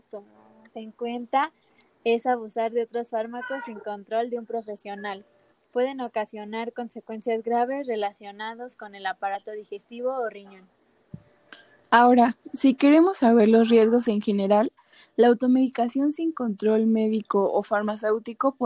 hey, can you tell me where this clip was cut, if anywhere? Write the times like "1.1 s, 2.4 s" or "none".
none